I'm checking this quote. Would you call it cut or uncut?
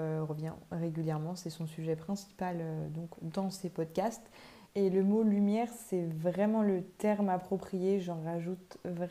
cut